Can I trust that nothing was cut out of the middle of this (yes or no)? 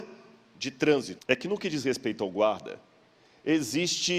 no